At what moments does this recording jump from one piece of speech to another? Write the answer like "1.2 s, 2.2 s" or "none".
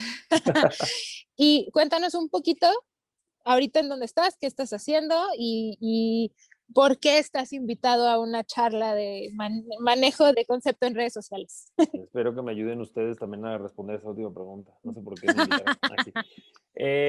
10.3 s